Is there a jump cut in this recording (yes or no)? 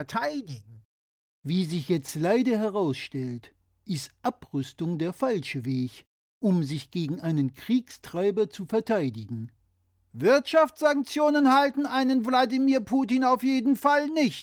no